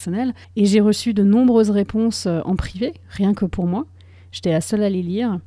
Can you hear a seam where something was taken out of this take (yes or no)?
no